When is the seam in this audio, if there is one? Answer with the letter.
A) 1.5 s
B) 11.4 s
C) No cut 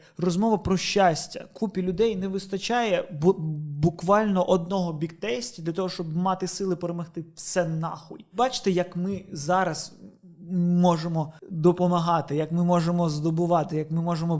B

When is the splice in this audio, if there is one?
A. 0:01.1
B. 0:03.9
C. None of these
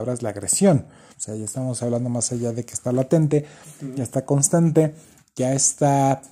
A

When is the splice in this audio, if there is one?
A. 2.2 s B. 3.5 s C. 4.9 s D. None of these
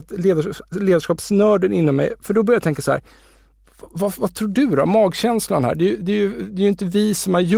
D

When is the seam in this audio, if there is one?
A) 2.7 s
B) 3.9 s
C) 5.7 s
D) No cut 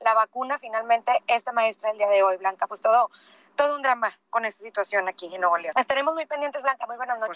C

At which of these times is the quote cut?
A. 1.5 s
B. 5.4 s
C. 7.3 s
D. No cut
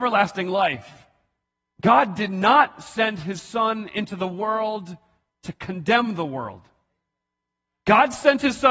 D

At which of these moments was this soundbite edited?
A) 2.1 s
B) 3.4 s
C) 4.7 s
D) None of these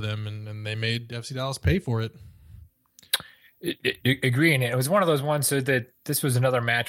D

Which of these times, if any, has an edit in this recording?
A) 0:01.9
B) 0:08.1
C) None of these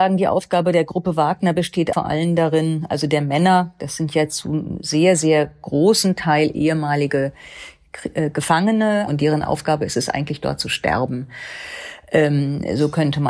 A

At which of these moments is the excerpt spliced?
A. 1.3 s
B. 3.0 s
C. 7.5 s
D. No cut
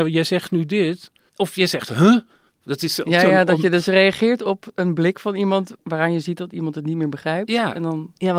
A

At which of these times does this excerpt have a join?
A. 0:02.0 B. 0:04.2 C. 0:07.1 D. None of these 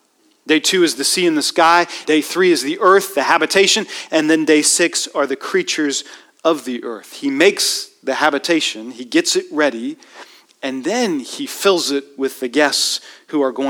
A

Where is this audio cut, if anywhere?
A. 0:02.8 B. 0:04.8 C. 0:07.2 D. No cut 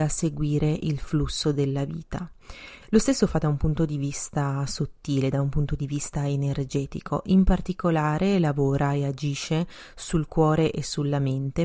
A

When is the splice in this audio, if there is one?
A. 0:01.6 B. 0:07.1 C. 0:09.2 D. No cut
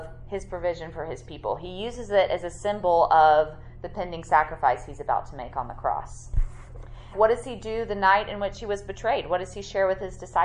B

